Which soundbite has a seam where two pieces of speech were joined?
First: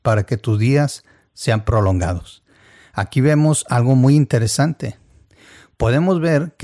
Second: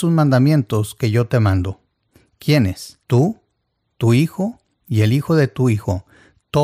second; 1 cut; at 3.0 s

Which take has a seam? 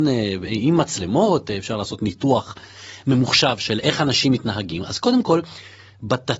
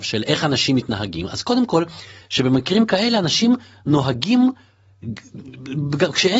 second; 1 cut; at 2.2 s

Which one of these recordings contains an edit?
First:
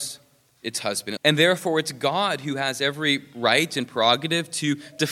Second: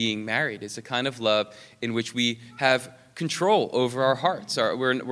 first; 1 cut; at 1.2 s

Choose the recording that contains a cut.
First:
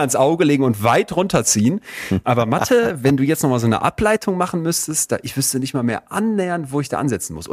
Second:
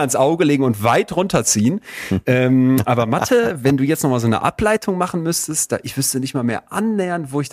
first; 1 cut; at 2.2 s

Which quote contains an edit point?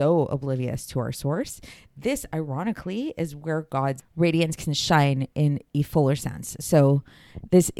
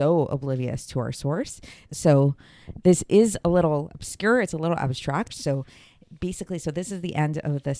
second; 2 cuts; at 1.9 s, 5.3 s

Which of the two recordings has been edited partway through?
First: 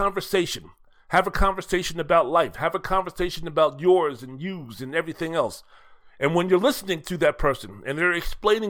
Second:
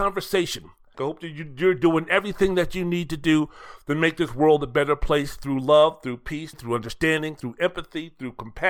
second; 2 cuts; at 0.9 s, 6.5 s

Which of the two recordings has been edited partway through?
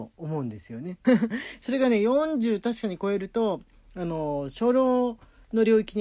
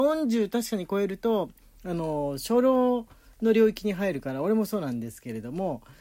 first; 1 cut; at 1.0 s

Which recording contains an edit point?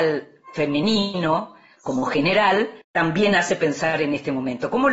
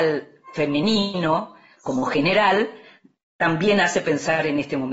first; 1 cut; at 2.8 s

